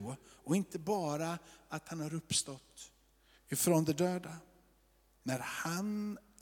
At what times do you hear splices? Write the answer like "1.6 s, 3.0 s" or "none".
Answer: none